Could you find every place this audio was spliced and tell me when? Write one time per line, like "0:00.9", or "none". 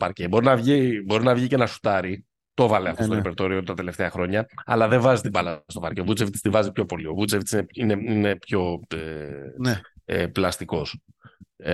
none